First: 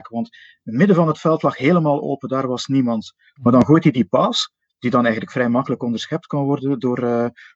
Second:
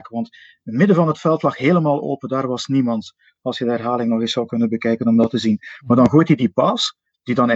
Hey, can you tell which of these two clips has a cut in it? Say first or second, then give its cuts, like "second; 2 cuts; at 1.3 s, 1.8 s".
first; 1 cut; at 3.4 s